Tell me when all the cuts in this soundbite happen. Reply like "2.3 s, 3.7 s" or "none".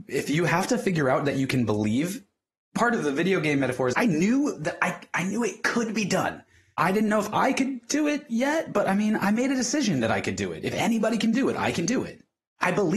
3.9 s